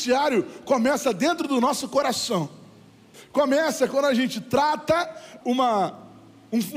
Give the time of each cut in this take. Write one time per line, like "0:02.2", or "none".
0:03.1
0:05.4